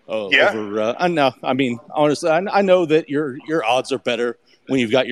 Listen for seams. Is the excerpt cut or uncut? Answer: uncut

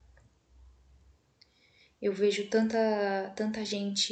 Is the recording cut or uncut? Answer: uncut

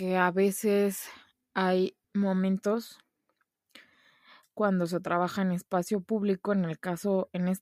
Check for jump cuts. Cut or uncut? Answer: cut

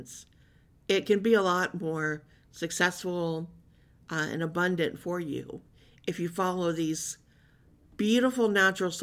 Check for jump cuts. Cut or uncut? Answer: uncut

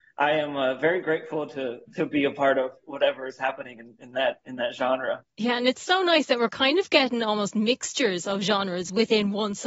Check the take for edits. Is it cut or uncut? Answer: uncut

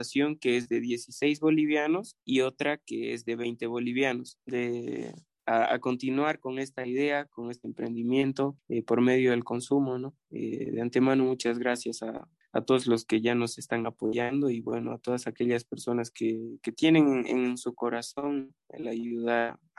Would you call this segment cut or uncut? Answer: cut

